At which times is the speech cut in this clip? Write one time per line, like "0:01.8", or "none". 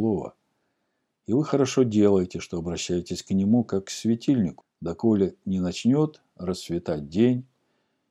0:04.6